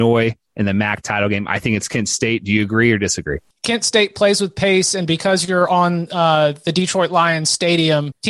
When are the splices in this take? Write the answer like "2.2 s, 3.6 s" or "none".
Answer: none